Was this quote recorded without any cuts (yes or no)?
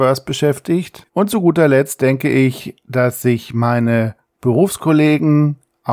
no